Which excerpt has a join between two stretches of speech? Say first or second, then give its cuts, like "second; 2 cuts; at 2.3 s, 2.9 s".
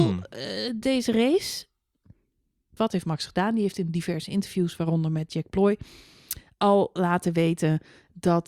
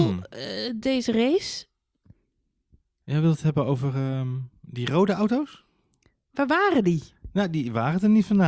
first; 1 cut; at 2.8 s